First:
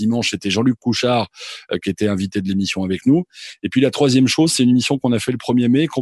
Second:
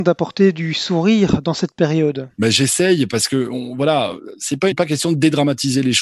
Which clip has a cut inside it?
second; 1 cut; at 4.7 s

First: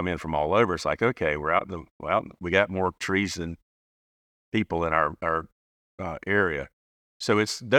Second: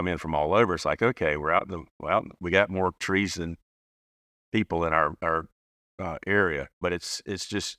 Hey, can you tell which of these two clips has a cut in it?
second; 1 cut; at 6.8 s

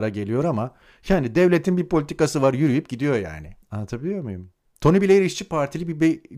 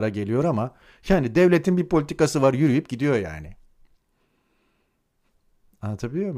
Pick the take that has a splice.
first; 1 cut; at 3.6 s

